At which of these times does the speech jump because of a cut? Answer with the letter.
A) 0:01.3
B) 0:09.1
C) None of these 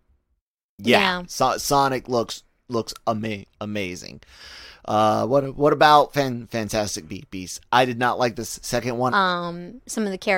B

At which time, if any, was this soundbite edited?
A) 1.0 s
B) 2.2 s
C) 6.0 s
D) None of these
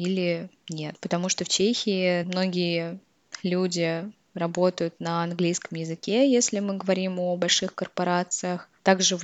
B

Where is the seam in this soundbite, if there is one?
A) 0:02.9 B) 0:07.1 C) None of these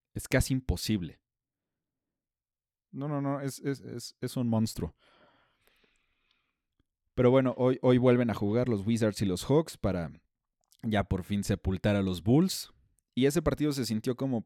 A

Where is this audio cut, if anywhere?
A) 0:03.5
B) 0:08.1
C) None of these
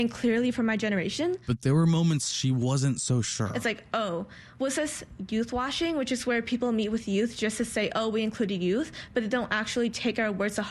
C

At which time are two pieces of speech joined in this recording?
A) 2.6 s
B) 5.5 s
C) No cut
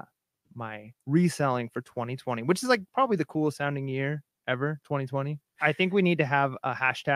B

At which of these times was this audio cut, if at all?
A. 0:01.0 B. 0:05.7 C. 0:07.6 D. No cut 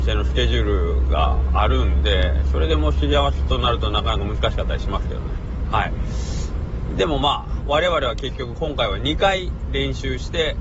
C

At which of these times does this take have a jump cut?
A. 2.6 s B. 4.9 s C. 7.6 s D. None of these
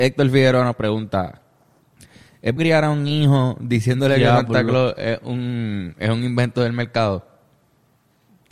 A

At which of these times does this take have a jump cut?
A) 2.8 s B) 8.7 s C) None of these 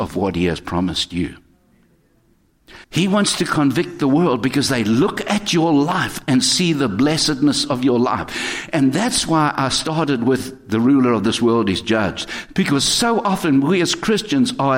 A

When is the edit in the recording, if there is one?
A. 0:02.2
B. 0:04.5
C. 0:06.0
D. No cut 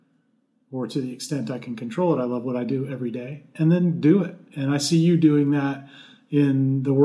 D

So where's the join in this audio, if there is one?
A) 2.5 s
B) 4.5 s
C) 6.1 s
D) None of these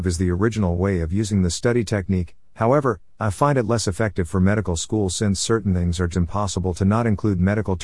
C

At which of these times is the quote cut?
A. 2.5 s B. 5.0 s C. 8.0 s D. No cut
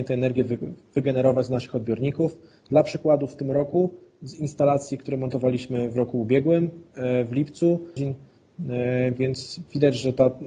C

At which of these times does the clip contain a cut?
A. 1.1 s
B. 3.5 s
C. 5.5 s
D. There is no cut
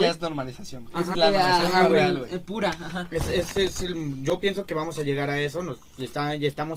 A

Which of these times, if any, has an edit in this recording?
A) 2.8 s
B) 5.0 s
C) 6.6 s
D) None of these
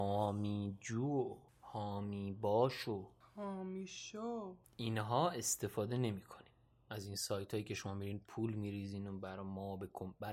D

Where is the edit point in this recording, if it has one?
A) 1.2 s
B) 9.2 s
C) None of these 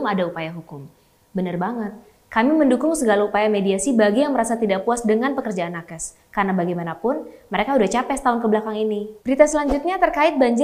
B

